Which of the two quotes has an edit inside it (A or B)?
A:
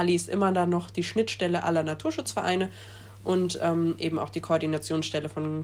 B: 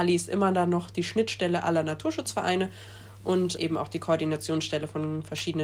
B